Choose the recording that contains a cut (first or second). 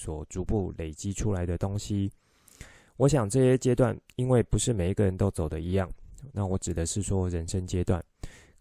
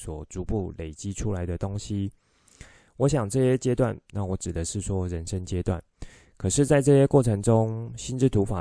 second